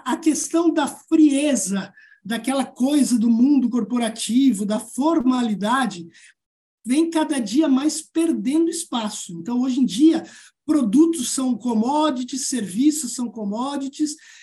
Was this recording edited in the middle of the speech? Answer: no; 0 cuts

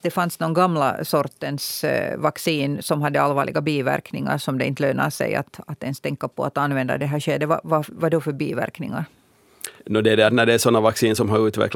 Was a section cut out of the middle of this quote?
yes; 1 cut; at 9.8 s

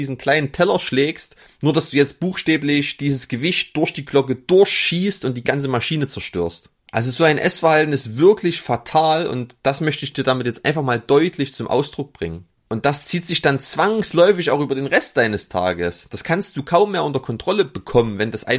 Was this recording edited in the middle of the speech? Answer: yes; 1 cut; at 1.5 s

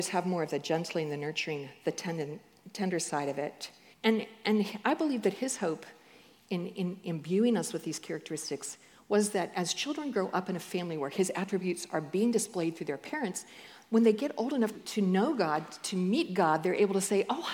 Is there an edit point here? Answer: yes; 2 cuts; at 3.9 s, 14.7 s

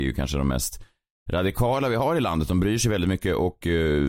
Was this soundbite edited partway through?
no; 0 cuts

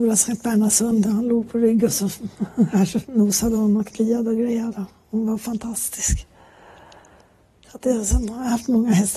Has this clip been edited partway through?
yes; 1 cut; at 3.0 s

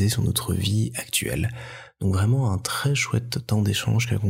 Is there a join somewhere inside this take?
no; 0 cuts

